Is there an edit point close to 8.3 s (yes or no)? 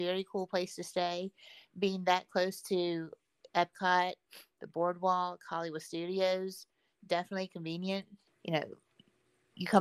yes